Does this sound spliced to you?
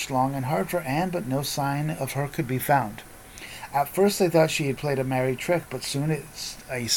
no; 0 cuts

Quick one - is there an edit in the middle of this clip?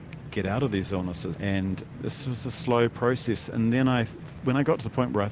yes; 1 cut; at 1.3 s

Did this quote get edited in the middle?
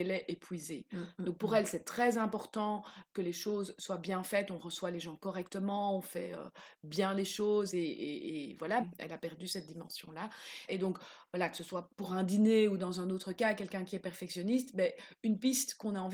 yes; 2 cuts; at 8.8 s, 10.7 s

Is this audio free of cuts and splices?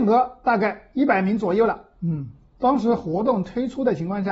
yes; 0 cuts

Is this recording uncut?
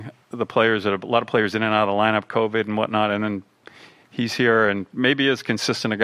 yes; 0 cuts

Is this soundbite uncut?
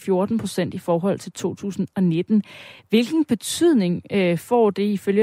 yes; 0 cuts

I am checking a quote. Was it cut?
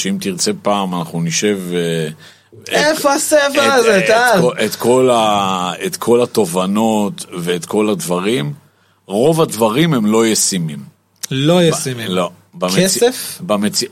no; 0 cuts

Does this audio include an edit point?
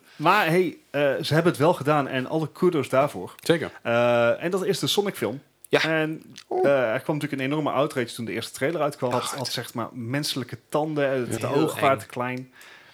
yes; 2 cuts; at 9.1 s, 11.4 s

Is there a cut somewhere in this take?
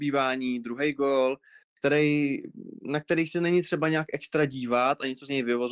no; 0 cuts

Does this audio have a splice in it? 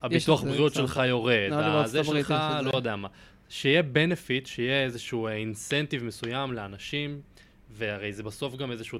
no; 0 cuts

